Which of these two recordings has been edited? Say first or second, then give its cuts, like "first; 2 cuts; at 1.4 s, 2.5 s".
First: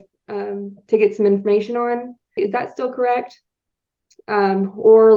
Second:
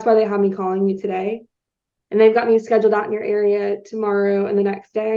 first; 2 cuts; at 2.4 s, 4.1 s